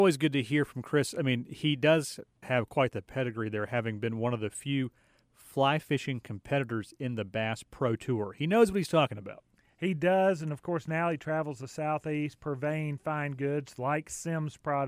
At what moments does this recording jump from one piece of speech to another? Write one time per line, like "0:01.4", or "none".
0:02.4